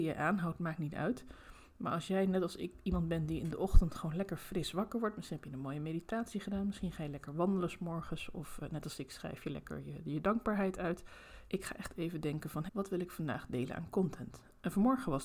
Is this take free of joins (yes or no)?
no